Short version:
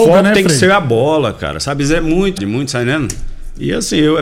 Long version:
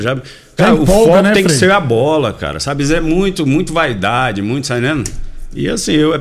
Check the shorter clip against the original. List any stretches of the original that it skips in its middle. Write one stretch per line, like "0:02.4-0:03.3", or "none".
0:03.4-0:04.3

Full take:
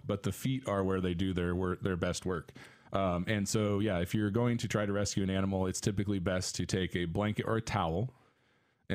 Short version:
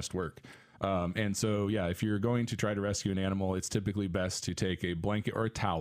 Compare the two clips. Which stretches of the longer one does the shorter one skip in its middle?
none

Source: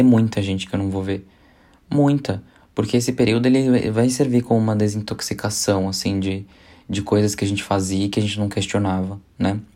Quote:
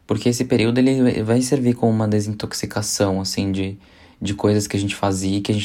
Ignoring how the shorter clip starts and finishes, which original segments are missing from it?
none

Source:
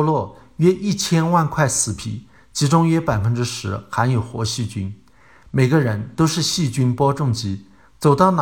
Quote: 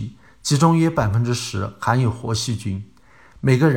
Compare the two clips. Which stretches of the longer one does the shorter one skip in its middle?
none

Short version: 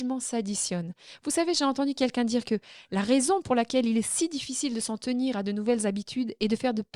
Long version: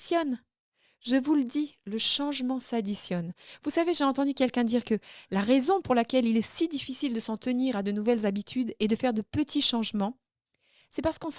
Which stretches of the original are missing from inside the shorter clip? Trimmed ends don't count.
none

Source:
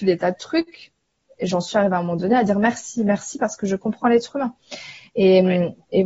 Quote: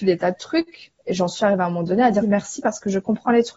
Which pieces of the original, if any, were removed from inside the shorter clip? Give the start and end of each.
0:01.0-0:01.3
0:02.5-0:03.0

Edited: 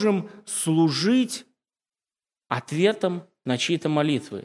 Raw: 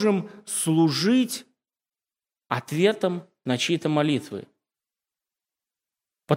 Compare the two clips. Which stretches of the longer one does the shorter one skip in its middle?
none

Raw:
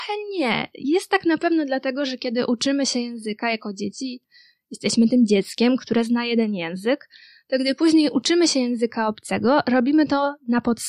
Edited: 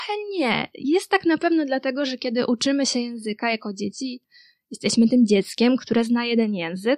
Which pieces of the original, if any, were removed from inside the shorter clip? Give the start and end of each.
none

